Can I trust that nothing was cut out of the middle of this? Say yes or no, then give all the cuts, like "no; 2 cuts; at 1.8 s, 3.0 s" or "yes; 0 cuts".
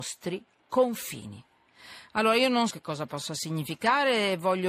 no; 1 cut; at 2.7 s